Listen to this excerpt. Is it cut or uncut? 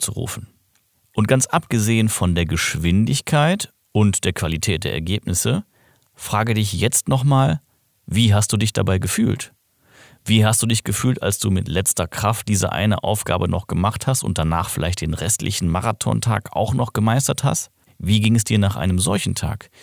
cut